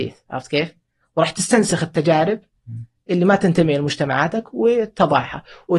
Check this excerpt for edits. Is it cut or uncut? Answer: uncut